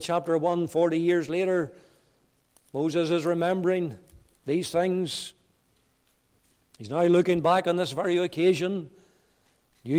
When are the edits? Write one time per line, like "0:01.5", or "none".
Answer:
none